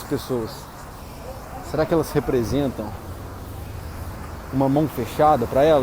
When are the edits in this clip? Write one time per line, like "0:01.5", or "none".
none

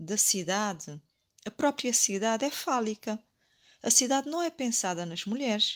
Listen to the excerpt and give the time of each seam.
none

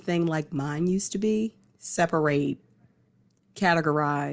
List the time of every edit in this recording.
0:01.7

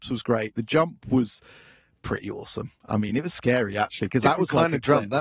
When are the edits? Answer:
none

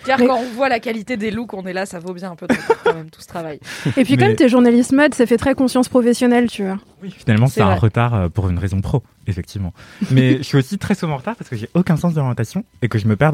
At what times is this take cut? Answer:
none

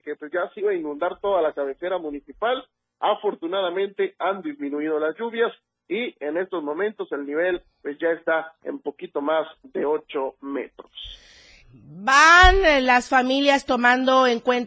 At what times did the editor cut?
0:11.6

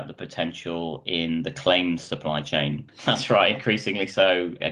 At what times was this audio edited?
0:02.9

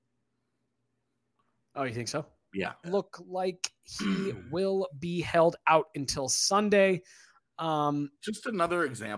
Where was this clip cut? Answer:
0:02.8

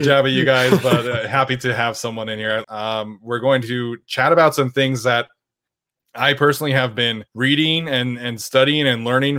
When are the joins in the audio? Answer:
0:02.6
0:07.3

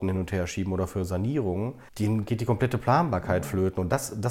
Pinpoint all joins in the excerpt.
0:01.9

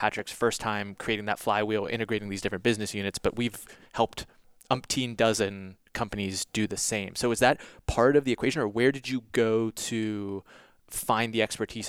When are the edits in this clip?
none

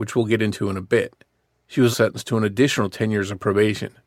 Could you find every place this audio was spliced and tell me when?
0:01.9

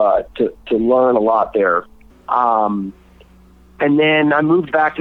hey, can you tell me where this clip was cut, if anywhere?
0:02.1

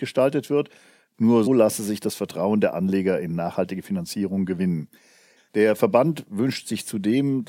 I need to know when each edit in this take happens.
0:01.5
0:05.4

